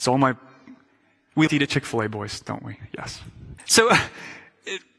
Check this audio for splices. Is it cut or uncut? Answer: cut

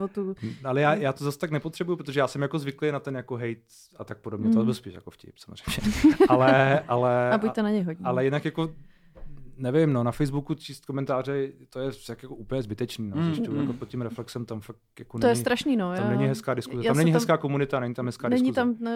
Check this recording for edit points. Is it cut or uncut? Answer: uncut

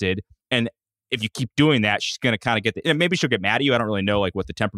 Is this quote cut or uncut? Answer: uncut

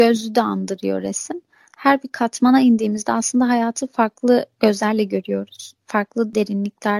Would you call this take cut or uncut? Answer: uncut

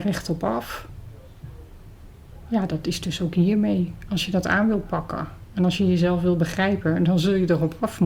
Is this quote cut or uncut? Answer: uncut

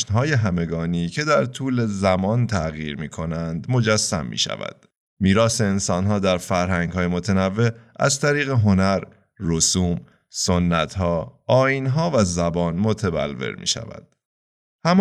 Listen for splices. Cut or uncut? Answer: uncut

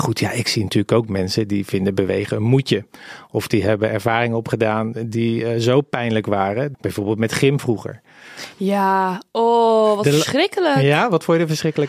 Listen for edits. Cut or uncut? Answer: cut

